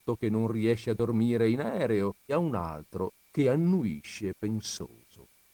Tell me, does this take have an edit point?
yes; 1 cut; at 2.3 s

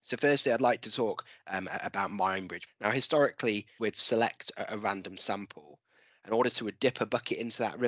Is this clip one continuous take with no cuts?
no; 3 cuts; at 2.7 s, 3.8 s, 6.1 s

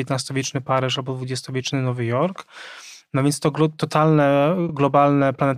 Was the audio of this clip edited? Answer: no; 0 cuts

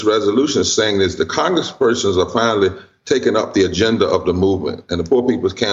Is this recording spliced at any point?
no; 0 cuts

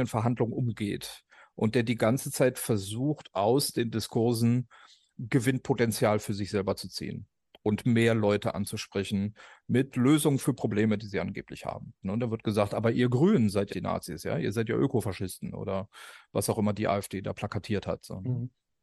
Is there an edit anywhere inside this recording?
yes; 2 cuts; at 12.0 s, 13.7 s

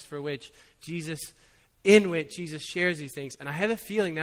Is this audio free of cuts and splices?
yes; 0 cuts

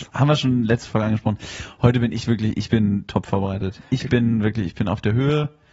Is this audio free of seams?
yes; 0 cuts

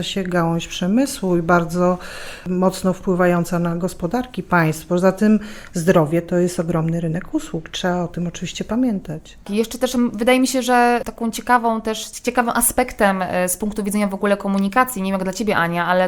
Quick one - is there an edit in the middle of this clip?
no; 0 cuts

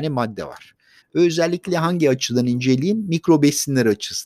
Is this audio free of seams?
no; 1 cut; at 1.0 s

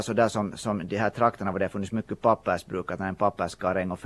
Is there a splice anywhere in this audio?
no; 0 cuts

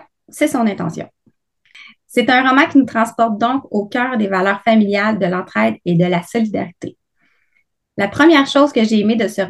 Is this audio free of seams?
yes; 0 cuts

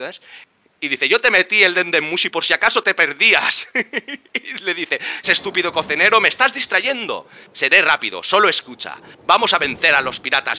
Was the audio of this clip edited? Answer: yes; 1 cut; at 5.2 s

